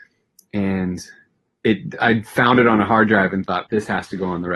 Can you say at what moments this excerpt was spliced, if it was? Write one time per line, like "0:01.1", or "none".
0:03.7